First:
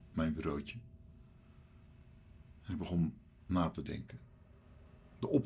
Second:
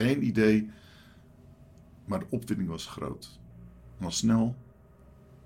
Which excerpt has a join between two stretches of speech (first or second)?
first